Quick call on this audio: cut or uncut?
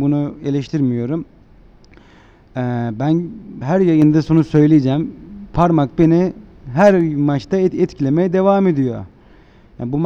uncut